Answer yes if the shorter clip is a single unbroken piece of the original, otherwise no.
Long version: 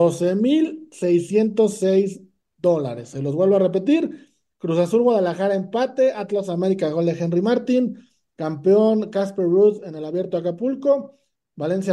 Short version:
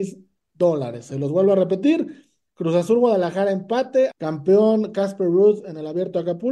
no